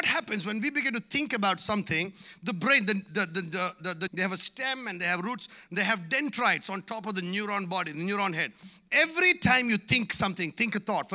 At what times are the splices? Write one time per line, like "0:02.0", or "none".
0:04.1